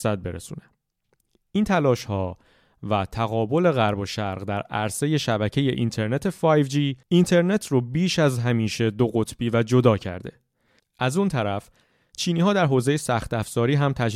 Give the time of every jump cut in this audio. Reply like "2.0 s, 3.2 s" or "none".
7.0 s, 10.8 s